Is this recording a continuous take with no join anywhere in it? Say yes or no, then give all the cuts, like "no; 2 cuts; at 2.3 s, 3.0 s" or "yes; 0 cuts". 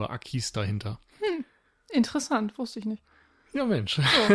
yes; 0 cuts